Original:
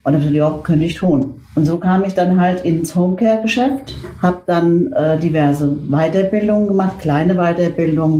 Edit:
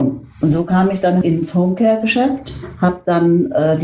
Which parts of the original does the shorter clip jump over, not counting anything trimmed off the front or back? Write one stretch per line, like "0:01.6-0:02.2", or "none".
0:02.4-0:02.6